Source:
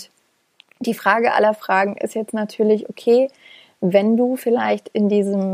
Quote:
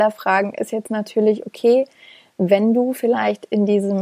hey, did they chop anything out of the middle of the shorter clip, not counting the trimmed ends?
no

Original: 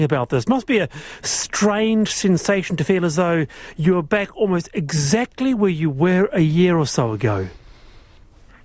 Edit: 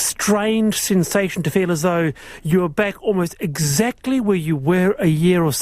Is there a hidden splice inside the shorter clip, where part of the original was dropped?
no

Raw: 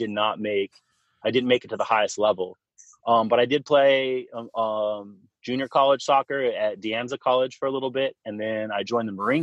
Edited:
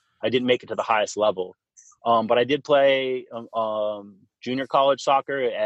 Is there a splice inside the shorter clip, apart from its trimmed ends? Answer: no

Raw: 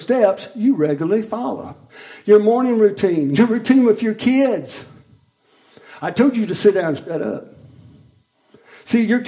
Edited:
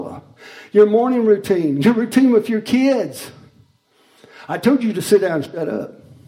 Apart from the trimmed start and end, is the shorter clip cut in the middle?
no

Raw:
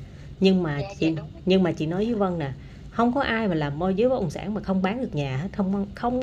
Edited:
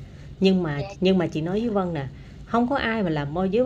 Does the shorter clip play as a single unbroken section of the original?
no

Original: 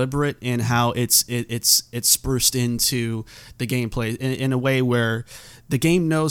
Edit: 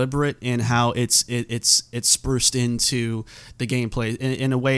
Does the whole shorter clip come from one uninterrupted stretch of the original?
yes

